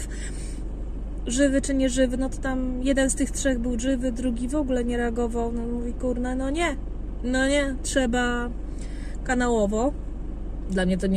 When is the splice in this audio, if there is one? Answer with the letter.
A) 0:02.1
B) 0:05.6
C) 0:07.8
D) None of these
C